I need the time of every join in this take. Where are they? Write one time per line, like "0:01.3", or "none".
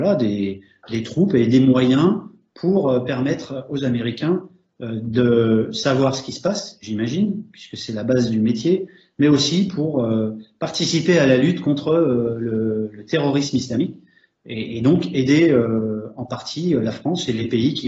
none